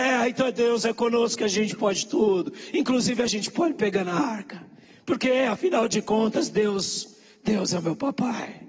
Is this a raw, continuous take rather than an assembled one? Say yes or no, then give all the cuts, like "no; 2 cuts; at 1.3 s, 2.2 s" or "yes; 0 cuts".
yes; 0 cuts